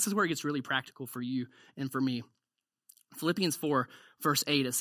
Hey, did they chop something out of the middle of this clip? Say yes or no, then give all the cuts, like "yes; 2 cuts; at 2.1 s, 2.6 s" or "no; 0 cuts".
no; 0 cuts